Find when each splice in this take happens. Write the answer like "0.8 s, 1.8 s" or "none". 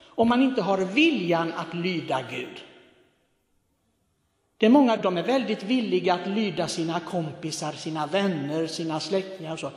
5.0 s

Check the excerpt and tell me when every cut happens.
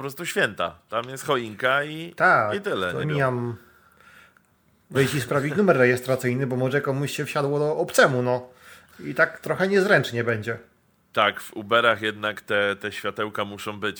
3.0 s, 4.9 s

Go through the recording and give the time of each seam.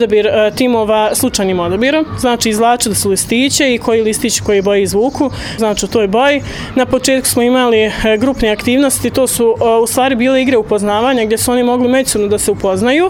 5.6 s

